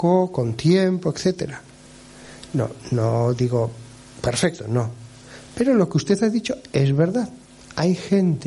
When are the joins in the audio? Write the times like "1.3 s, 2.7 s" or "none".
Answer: none